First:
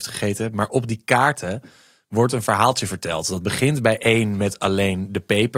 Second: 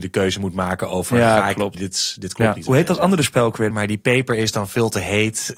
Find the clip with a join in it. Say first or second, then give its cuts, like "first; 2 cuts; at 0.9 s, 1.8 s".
second; 2 cuts; at 1.7 s, 3.7 s